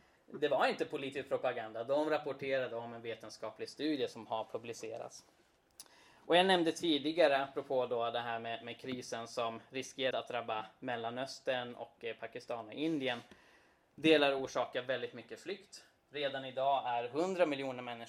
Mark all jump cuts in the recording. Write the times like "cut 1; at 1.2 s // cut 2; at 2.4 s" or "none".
cut 1; at 10.1 s